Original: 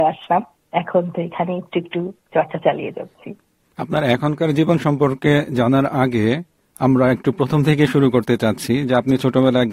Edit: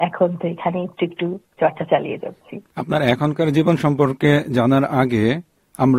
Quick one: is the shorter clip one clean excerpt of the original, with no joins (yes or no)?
no